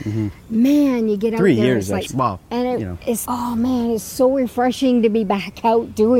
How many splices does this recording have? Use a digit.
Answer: 2